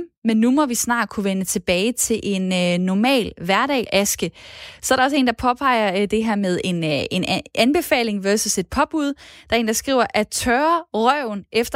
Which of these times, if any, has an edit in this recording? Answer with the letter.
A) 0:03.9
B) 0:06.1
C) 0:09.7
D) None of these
A